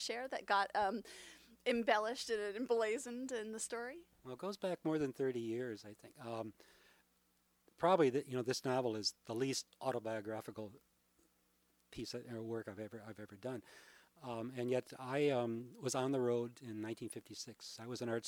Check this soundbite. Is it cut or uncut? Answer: uncut